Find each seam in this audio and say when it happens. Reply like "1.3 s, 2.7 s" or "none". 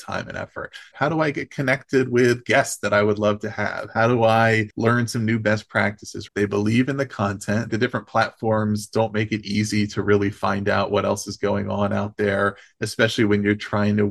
0.9 s, 6.3 s, 7.7 s

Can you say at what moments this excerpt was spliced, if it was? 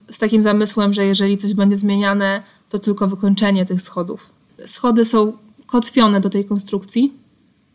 4.5 s

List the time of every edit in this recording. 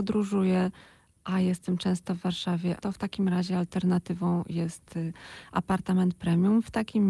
2.8 s

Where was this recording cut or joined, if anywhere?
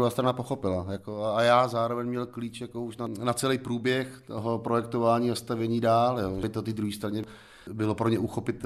none

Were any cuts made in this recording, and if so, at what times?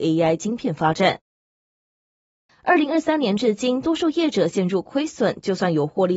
2.5 s

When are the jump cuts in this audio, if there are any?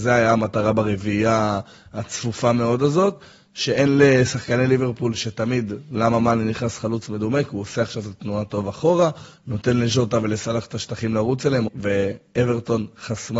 11.7 s

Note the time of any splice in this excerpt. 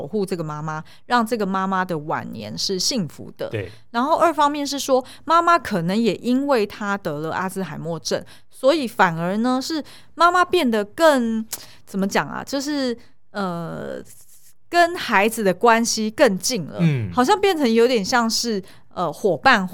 none

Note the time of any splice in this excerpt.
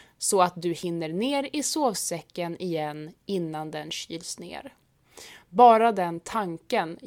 none

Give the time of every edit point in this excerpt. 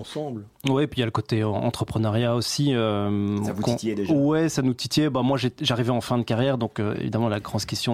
none

